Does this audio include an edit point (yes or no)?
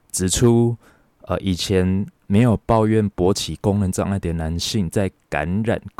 no